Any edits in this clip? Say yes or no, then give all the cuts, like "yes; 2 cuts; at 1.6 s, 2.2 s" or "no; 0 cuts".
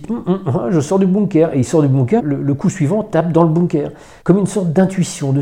yes; 2 cuts; at 2.2 s, 4.2 s